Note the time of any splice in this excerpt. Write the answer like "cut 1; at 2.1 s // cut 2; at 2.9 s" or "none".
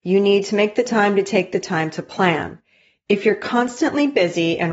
none